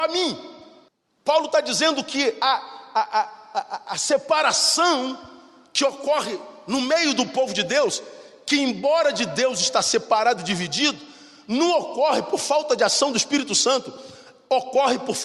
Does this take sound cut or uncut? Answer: uncut